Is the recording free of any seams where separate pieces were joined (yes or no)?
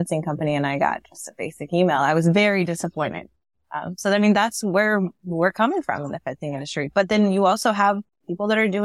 yes